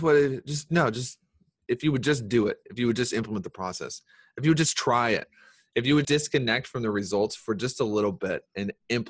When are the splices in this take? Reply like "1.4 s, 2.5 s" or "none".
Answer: 6.0 s